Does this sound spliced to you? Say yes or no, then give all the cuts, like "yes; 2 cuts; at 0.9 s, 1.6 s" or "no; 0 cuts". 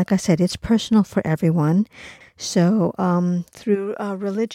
yes; 1 cut; at 2.2 s